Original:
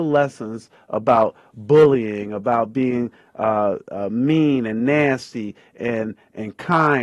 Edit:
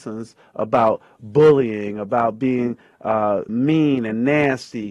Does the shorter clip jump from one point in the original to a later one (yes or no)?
yes